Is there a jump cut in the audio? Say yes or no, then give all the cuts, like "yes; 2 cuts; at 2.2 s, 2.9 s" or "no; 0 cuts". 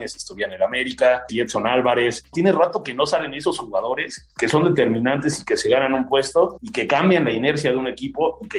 yes; 1 cut; at 1.3 s